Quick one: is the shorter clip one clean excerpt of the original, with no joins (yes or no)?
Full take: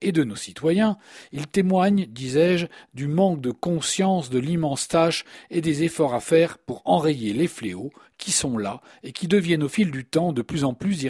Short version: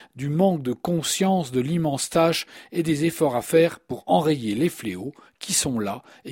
yes